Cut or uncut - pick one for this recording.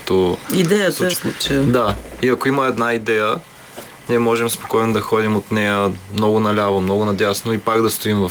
cut